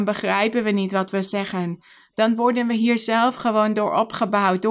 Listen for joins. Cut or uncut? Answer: uncut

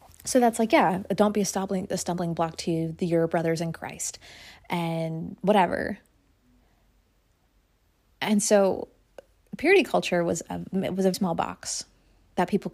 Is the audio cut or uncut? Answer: cut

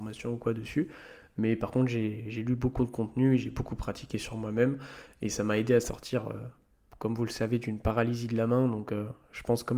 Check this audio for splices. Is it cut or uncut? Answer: uncut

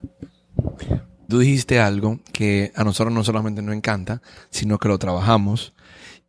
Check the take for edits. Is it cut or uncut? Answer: cut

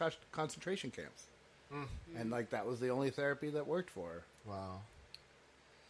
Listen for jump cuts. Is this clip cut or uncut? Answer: uncut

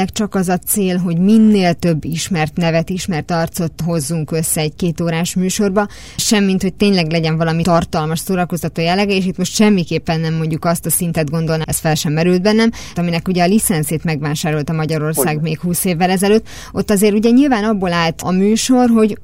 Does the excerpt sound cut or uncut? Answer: cut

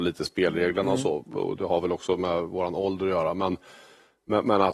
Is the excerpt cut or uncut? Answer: uncut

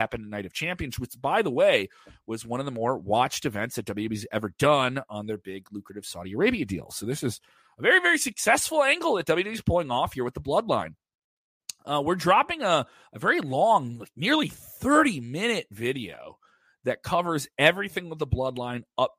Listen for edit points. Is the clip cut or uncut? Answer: uncut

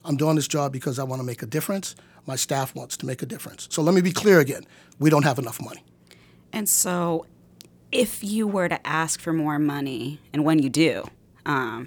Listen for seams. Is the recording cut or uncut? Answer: uncut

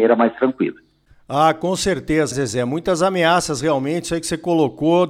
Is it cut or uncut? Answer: cut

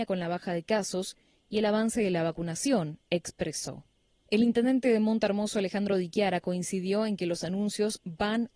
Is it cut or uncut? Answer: cut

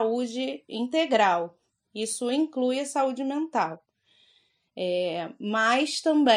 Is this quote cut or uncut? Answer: cut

